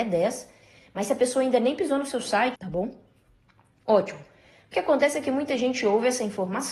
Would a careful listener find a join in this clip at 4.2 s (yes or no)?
no